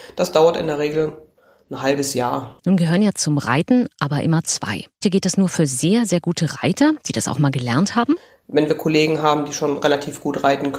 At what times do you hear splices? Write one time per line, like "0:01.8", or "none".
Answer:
0:02.6
0:05.0